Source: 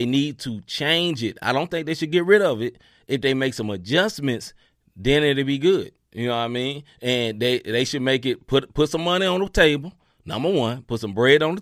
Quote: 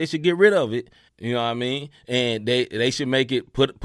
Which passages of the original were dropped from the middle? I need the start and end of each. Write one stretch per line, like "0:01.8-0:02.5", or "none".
0:03.0-0:06.0